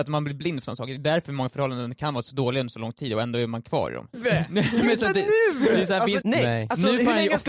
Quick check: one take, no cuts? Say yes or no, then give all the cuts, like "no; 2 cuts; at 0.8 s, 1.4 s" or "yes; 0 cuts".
no; 2 cuts; at 4.1 s, 6.2 s